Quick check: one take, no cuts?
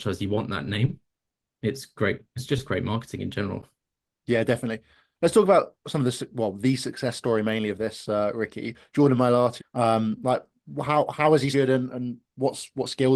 no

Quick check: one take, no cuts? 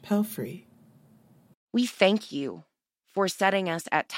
no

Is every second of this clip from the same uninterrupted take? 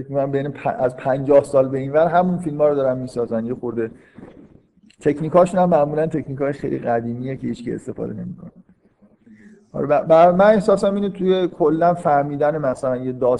no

